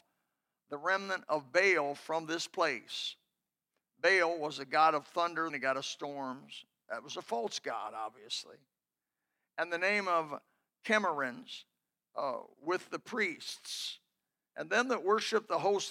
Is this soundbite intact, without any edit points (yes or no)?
no